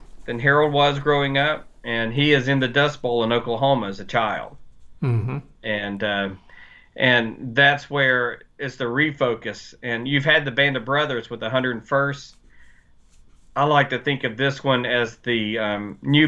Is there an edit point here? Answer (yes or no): no